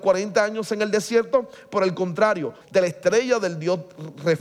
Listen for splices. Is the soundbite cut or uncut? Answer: cut